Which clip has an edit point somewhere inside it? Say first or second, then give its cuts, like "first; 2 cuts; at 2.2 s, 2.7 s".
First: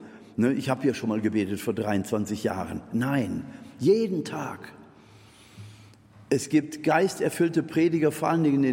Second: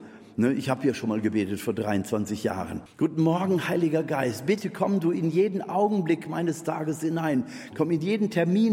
second; 2 cuts; at 2.9 s, 7.7 s